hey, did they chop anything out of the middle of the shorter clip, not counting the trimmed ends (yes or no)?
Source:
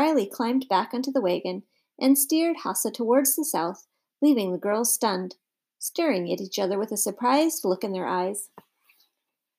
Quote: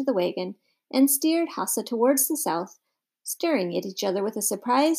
yes